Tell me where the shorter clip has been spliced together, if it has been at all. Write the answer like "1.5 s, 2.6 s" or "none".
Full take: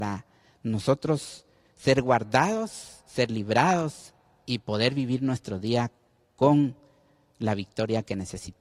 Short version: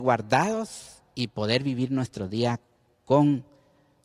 1.0 s